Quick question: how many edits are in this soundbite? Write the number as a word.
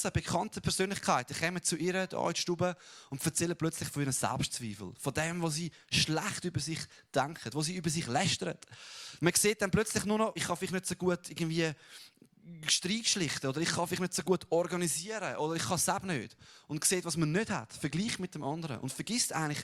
two